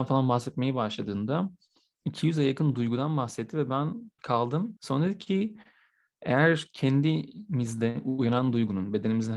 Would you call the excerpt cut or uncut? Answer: cut